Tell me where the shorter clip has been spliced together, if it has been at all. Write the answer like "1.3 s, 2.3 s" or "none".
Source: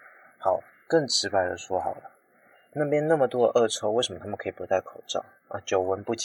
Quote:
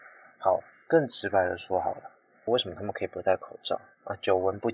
2.5 s